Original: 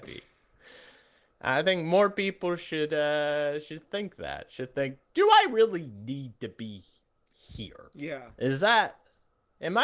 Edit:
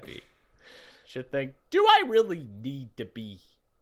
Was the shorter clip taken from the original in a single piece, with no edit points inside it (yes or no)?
no